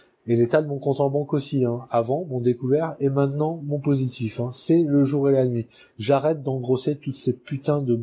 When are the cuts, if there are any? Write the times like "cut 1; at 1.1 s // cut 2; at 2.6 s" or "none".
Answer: none